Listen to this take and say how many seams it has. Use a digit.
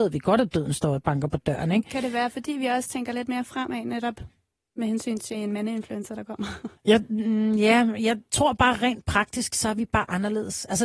1